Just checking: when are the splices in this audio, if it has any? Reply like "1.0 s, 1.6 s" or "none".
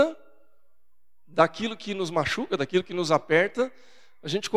none